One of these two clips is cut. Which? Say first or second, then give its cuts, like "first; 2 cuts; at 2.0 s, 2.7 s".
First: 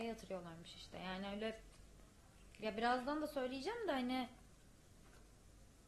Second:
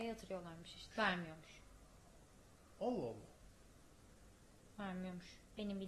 second; 1 cut; at 0.9 s